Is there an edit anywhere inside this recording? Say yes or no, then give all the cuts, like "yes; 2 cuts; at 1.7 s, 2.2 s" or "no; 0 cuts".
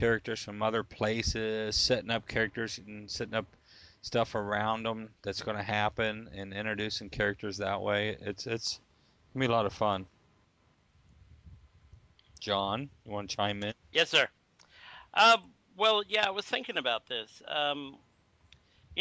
no; 0 cuts